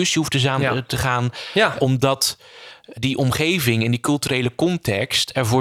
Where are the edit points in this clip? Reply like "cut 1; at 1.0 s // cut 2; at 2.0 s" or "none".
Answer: cut 1; at 1.8 s // cut 2; at 3.0 s